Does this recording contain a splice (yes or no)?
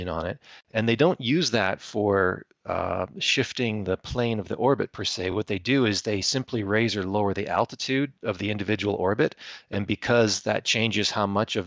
no